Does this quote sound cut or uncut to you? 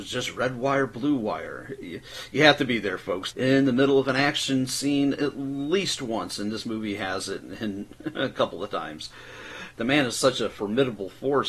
cut